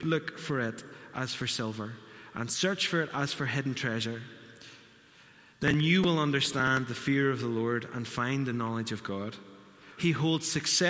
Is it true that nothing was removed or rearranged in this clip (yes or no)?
no